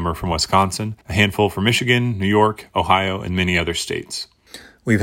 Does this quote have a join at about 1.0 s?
yes; 1 cut; at 1.0 s

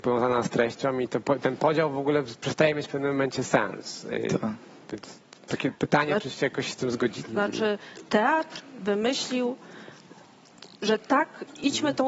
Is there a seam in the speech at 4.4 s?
no; 1 cut; at 7.2 s

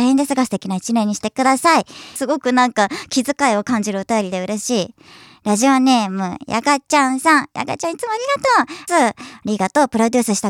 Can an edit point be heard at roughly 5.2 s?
no; 2 cuts; at 2.2 s, 8.9 s

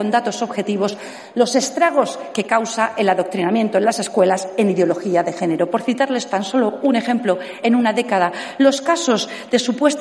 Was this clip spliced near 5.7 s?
no; 1 cut; at 7.6 s

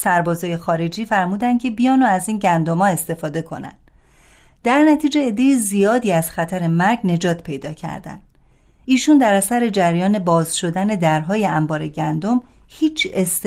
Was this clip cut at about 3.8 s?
no; 0 cuts

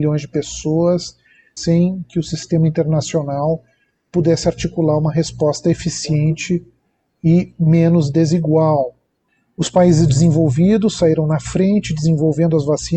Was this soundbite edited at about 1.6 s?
yes; 1 cut; at 1.6 s

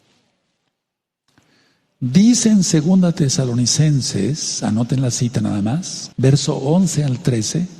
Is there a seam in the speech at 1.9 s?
no; 1 cut; at 6.1 s

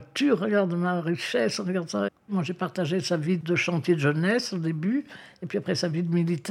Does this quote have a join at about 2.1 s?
yes; 1 cut; at 2.1 s

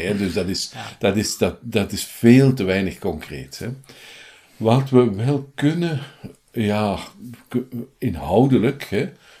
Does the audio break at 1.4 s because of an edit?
no; 0 cuts

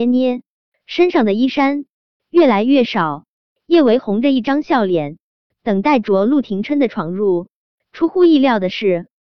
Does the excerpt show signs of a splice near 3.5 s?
no; 0 cuts

